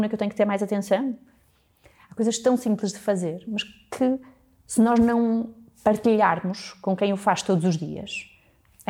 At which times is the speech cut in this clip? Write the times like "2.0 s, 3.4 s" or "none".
none